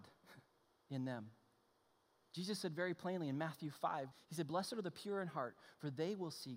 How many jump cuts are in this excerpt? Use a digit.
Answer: 1